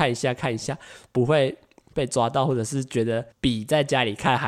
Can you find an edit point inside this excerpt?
yes; 1 cut; at 3.3 s

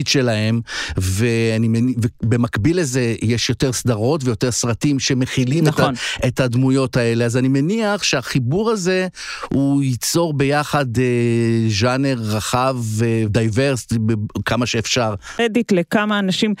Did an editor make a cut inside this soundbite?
yes; 1 cut; at 15.4 s

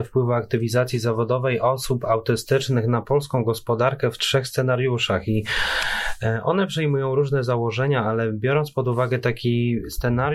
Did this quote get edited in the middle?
no; 0 cuts

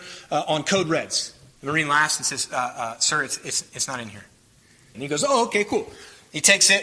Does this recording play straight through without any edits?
no; 2 cuts; at 1.6 s, 4.9 s

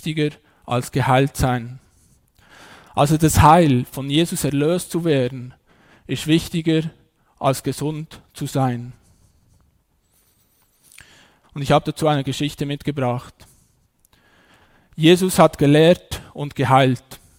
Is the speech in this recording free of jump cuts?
no; 1 cut; at 11.4 s

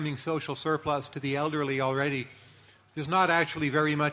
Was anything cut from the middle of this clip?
no; 0 cuts

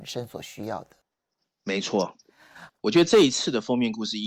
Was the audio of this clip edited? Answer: yes; 1 cut; at 2.7 s

